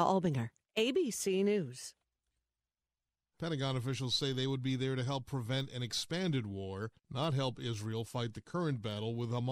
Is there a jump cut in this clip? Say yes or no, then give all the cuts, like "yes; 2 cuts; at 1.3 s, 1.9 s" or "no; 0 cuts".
yes; 1 cut; at 3.3 s